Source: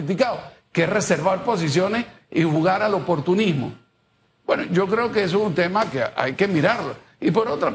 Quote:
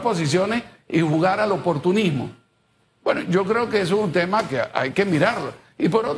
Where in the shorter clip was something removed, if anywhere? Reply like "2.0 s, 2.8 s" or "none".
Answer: none